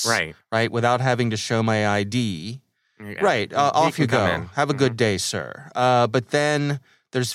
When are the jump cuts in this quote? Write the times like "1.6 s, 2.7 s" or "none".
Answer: 3.2 s